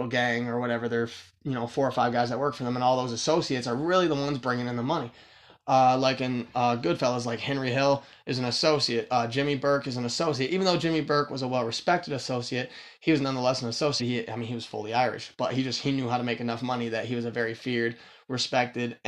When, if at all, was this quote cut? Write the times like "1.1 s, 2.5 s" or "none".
14.0 s